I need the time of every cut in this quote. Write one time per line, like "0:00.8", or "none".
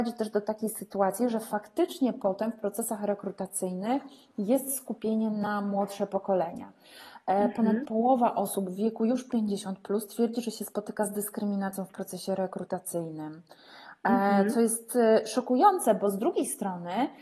none